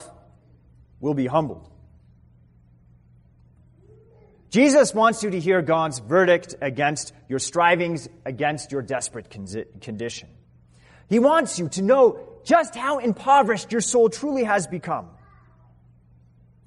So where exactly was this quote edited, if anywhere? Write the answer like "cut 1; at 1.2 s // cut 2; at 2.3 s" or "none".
none